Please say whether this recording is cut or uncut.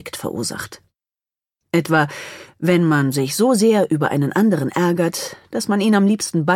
cut